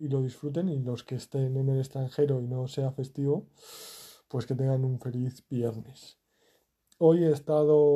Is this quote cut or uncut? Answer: uncut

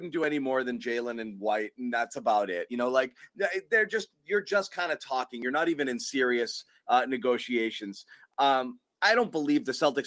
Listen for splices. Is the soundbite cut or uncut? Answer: uncut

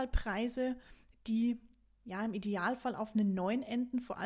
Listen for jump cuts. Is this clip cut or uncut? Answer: uncut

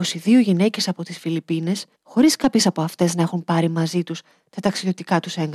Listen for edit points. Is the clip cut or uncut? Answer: cut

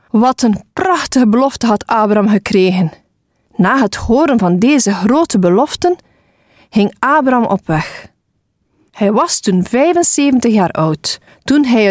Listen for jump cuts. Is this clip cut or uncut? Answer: cut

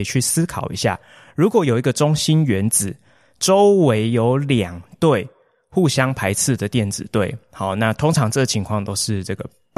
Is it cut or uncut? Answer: uncut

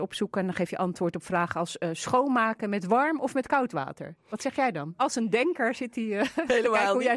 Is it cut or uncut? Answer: cut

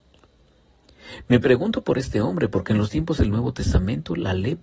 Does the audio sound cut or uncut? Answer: uncut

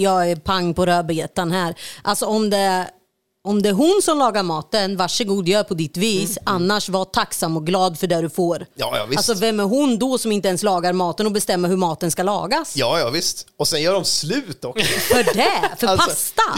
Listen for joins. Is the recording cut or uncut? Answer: uncut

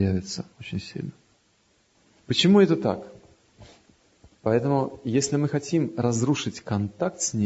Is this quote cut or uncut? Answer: cut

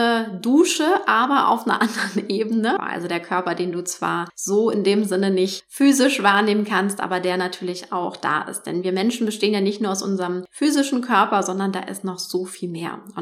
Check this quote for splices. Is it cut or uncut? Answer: cut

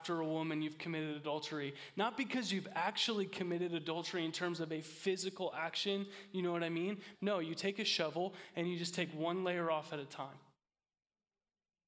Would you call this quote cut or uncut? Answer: cut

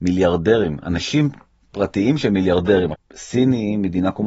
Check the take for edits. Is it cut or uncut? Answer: cut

